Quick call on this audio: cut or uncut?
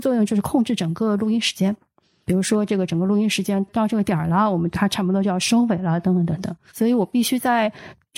cut